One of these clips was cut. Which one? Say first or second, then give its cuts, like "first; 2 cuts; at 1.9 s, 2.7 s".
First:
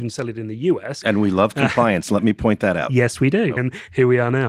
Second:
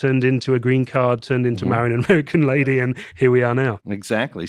first; 2 cuts; at 1.0 s, 3.6 s